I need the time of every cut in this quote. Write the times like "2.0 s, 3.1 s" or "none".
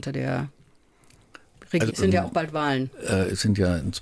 1.9 s

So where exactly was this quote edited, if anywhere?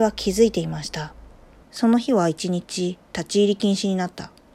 1.6 s, 3.0 s

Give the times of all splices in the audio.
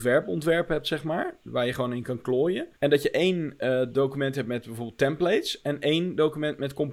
2.7 s

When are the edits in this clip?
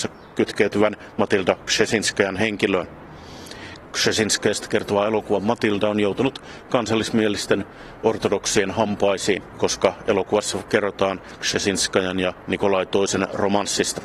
none

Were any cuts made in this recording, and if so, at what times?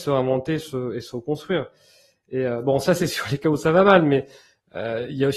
none

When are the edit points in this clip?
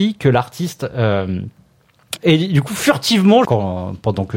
2.2 s, 3.4 s

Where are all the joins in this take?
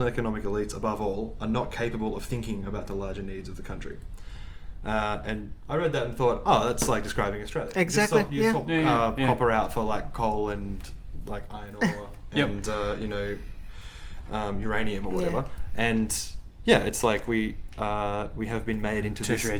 none

